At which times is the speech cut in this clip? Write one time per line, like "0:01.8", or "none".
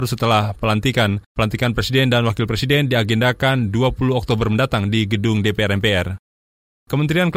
none